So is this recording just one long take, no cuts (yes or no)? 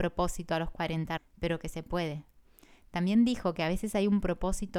no